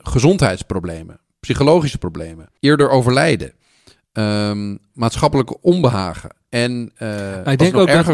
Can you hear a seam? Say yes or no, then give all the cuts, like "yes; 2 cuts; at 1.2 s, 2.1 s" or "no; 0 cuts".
yes; 1 cut; at 2.6 s